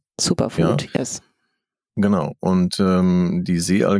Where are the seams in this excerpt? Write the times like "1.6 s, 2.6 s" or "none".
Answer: none